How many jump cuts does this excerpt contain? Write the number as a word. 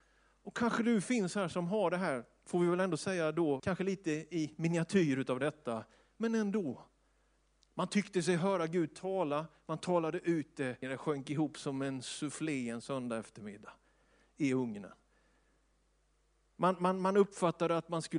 two